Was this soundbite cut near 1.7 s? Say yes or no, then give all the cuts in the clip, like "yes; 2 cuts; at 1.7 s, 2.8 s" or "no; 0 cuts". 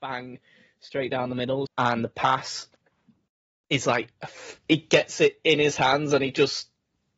yes; 1 cut; at 1.7 s